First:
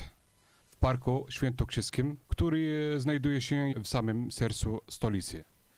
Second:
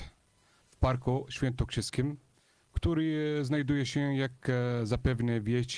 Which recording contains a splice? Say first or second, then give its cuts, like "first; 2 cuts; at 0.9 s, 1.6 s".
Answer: first; 2 cuts; at 2.2 s, 3.7 s